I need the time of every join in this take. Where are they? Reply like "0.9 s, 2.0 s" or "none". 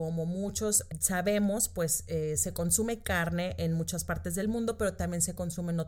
none